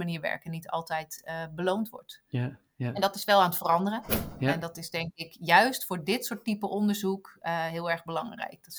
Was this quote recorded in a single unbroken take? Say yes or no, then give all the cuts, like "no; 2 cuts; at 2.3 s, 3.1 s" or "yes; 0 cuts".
yes; 0 cuts